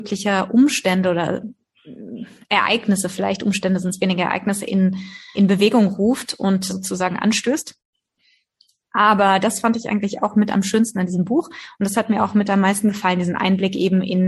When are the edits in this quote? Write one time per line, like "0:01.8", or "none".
0:05.3
0:06.7

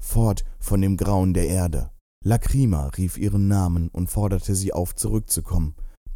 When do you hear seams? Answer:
0:02.0

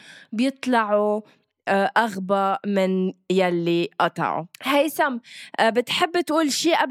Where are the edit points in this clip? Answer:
0:04.5

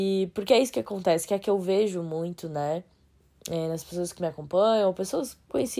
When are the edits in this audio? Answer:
none

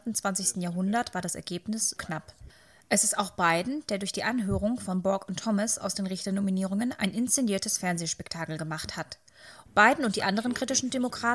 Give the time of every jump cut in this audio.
0:02.0
0:09.6

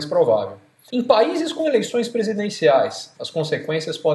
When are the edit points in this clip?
0:03.1

